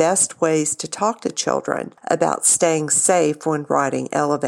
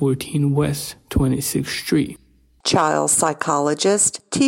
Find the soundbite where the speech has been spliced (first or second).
second